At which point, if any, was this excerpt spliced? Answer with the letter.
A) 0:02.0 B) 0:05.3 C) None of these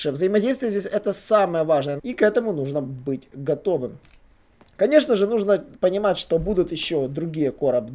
A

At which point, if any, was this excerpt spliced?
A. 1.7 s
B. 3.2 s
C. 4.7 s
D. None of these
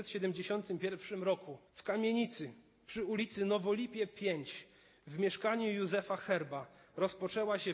A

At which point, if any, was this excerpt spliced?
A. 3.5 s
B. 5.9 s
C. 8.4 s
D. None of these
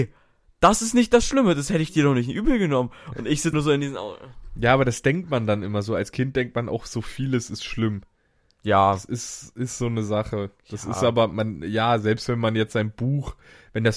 A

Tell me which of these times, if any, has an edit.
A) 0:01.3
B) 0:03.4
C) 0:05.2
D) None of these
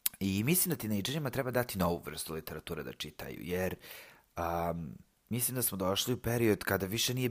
D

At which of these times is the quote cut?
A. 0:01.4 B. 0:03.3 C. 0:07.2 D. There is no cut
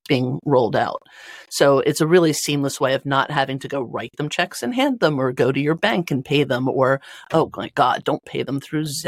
D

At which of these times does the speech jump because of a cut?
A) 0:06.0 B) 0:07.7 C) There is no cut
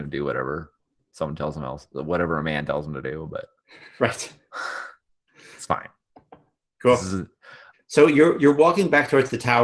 B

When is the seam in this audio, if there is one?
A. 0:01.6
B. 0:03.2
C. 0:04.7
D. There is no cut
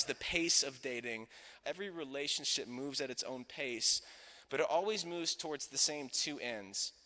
A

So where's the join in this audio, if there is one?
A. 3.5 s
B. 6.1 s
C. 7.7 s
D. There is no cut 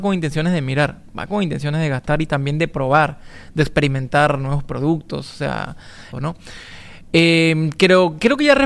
B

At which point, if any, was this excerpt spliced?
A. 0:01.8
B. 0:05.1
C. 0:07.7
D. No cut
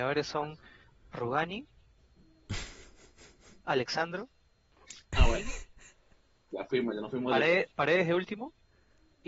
C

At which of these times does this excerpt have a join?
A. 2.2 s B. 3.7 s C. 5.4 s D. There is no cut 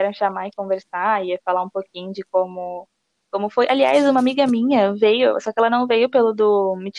D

